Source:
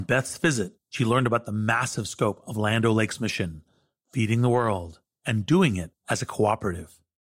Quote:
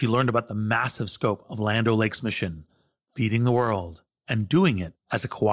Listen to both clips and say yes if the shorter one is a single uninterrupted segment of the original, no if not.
yes